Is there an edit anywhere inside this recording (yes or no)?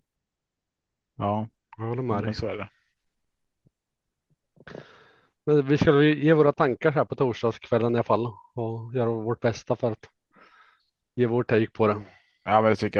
no